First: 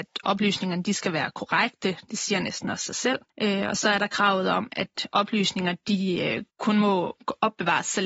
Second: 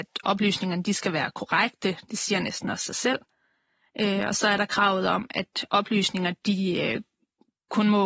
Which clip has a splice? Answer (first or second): first